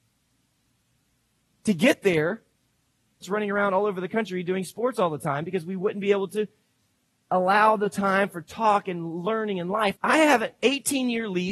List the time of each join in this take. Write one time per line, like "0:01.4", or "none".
0:03.2
0:10.0